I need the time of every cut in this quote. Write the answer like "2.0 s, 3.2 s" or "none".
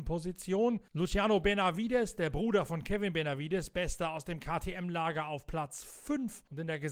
none